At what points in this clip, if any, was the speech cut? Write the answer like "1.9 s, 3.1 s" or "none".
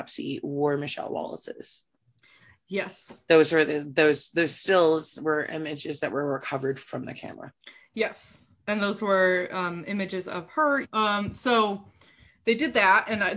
8.6 s, 10.8 s

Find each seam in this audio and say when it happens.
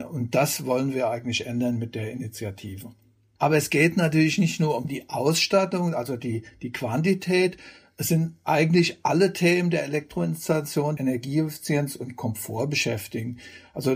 11.0 s

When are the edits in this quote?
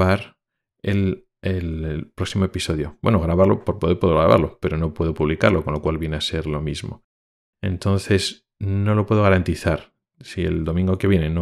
none

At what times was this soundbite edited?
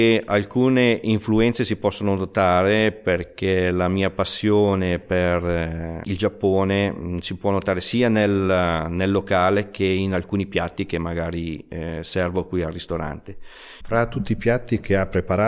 13.8 s

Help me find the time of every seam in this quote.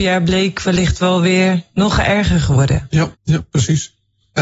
3.1 s

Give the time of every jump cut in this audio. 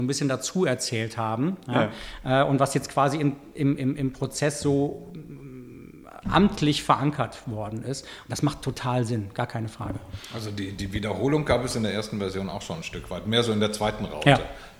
none

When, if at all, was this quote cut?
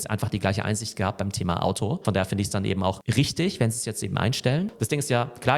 none

